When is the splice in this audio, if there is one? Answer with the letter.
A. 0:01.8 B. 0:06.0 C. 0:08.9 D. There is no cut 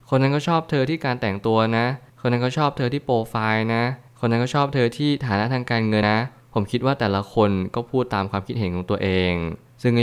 B